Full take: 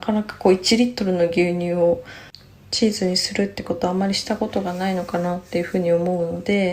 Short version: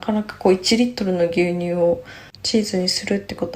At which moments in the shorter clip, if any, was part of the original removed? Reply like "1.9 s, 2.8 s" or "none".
2.3 s